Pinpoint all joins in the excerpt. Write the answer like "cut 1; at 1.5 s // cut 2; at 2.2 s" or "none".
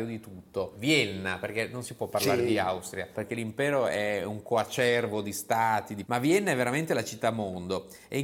cut 1; at 3.1 s